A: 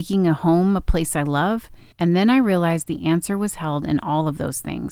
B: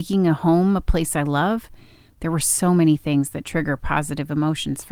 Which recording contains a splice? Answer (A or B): A